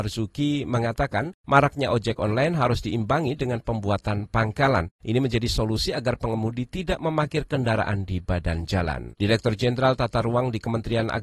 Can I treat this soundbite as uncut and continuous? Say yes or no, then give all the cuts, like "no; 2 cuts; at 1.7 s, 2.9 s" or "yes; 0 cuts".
no; 1 cut; at 9.1 s